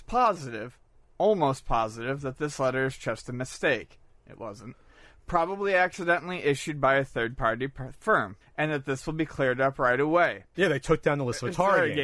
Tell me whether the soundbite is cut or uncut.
cut